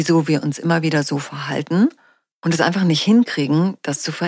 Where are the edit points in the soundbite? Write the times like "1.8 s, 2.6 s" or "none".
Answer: none